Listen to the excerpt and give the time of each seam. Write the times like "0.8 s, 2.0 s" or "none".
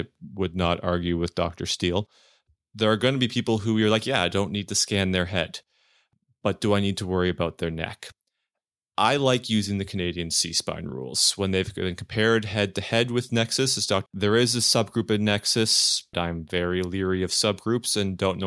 14.1 s, 16.1 s